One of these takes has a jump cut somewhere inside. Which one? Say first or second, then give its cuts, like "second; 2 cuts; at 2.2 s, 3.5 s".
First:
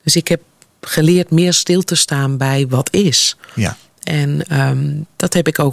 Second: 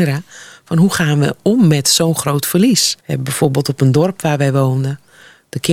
second; 1 cut; at 3.0 s